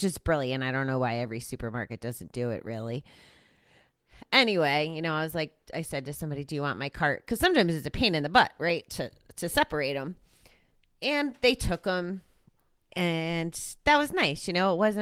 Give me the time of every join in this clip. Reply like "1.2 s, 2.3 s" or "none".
none